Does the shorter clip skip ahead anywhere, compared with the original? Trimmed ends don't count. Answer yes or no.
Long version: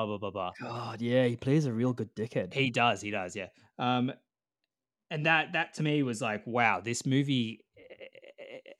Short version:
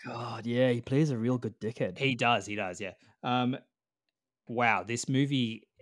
yes